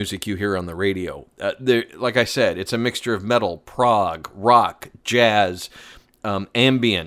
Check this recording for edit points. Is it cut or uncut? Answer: uncut